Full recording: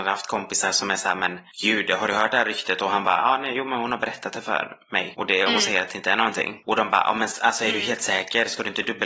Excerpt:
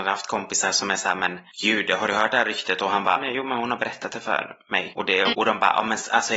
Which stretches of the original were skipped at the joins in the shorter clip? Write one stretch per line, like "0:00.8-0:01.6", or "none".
0:03.2-0:03.4
0:05.5-0:06.6